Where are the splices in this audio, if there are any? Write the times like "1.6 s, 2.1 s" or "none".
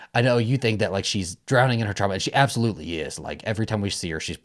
1.4 s